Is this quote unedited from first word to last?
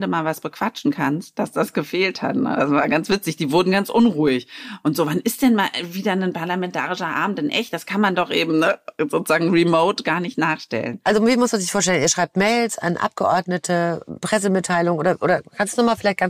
yes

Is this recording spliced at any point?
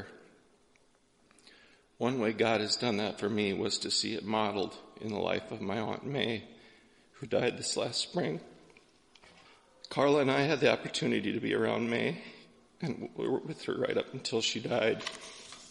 no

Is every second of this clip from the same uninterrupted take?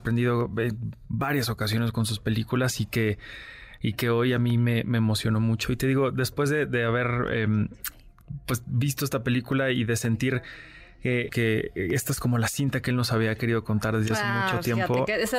no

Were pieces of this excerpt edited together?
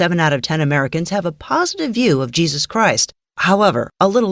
no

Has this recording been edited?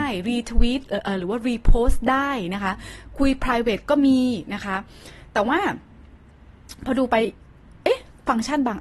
no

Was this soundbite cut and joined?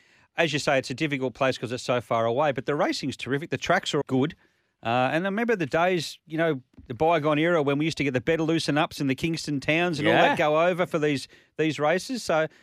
yes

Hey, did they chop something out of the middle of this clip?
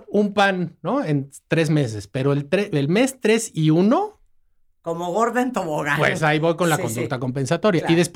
yes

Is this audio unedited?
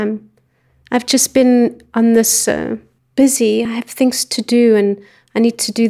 yes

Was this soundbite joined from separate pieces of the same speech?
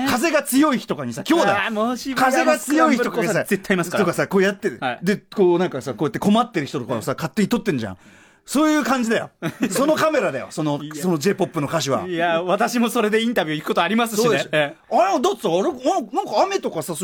no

